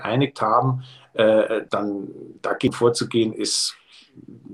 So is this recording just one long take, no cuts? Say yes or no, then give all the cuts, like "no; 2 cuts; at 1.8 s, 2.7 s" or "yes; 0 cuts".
no; 1 cut; at 1.7 s